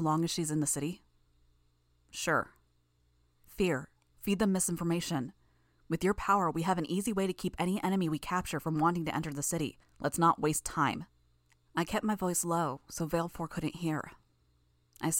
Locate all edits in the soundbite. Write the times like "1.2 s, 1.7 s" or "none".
4.1 s, 9.8 s, 11.5 s